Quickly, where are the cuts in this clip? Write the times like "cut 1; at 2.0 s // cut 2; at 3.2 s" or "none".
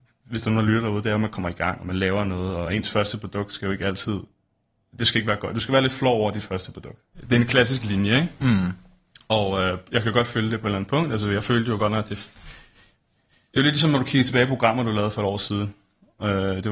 cut 1; at 7.1 s